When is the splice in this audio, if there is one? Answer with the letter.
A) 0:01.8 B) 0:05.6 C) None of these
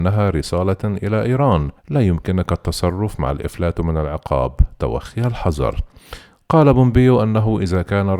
A